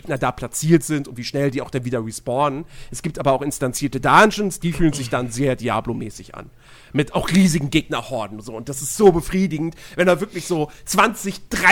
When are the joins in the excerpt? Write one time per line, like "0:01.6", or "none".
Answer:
none